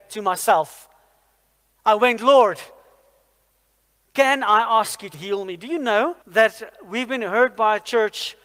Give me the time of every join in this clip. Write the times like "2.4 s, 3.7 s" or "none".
5.1 s, 6.2 s